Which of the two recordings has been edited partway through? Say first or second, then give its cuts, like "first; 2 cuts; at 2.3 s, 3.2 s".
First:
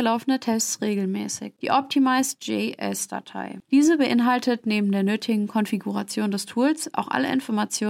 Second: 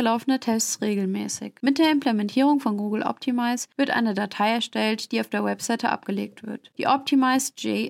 first; 1 cut; at 1.6 s